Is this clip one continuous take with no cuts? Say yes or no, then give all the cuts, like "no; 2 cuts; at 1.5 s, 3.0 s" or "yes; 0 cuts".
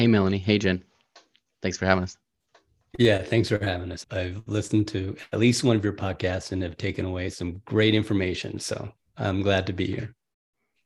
yes; 0 cuts